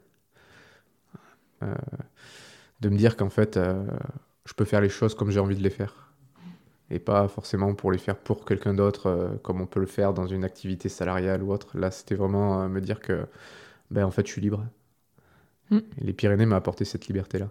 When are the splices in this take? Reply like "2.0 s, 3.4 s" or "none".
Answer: 1.6 s

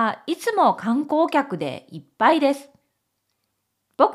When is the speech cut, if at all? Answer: none

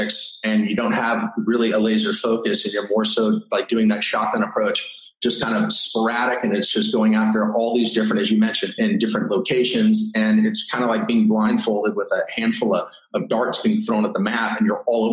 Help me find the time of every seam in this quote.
8.8 s

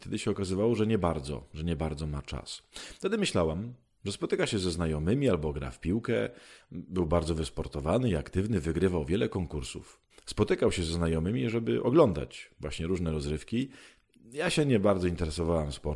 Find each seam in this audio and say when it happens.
10.1 s

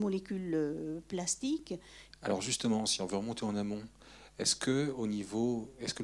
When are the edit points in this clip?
2.1 s

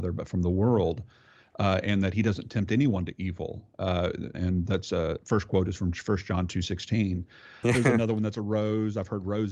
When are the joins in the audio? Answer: 4.3 s, 7.6 s

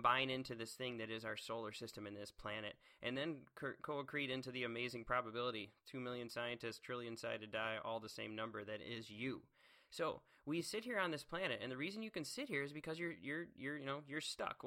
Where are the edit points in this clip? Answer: none

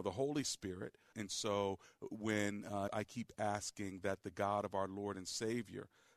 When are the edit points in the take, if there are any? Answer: 1.1 s, 2.9 s

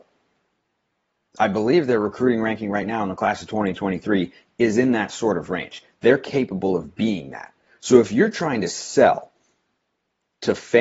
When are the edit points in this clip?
none

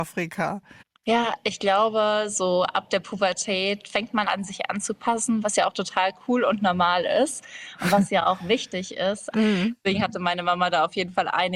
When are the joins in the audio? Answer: 4.2 s, 9.3 s

